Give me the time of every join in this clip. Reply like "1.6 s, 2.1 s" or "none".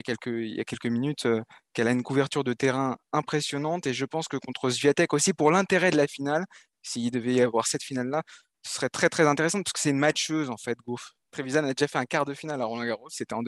11.2 s

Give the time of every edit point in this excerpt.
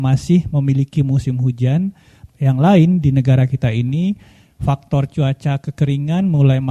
2.3 s

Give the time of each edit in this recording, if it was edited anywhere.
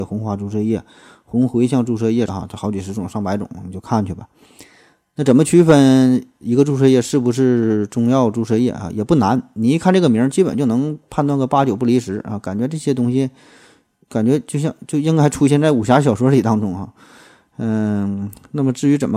2.3 s

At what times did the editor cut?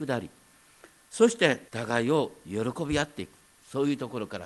1.7 s

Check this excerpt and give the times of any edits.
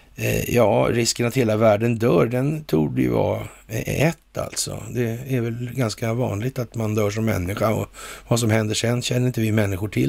none

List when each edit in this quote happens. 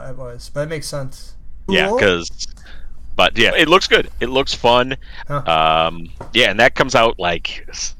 1.7 s, 3.5 s, 5.2 s

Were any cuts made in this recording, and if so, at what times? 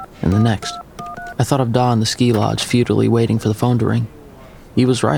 none

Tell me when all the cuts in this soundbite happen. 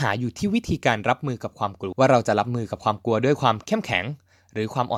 1.9 s

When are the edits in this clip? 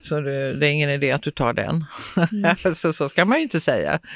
none

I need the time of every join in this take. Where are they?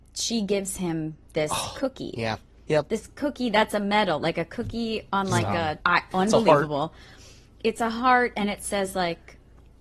5.8 s

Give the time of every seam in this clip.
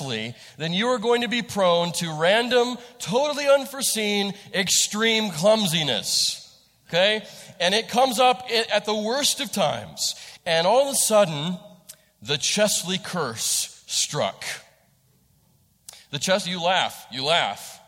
10.4 s

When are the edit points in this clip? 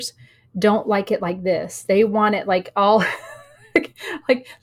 none

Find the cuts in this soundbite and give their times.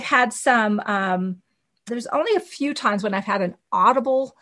1.9 s

